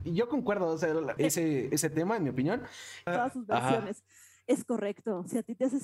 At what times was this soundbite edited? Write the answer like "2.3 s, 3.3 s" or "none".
1.2 s, 3.1 s